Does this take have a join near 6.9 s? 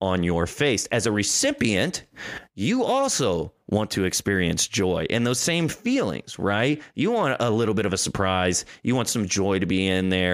no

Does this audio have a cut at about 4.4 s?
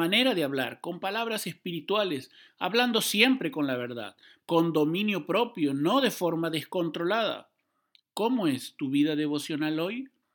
yes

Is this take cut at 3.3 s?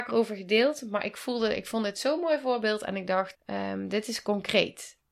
yes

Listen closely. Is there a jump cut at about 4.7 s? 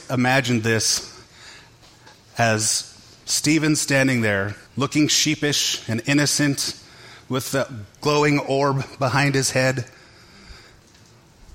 yes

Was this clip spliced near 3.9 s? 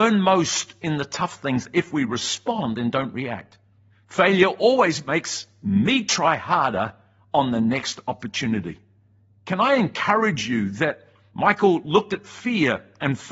yes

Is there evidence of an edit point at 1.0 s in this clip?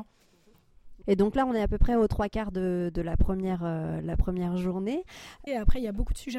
yes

